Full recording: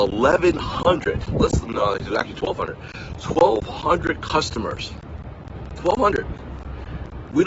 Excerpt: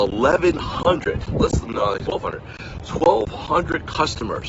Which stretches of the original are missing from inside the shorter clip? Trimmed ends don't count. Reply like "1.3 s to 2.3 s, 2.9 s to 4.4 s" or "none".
2.1 s to 2.4 s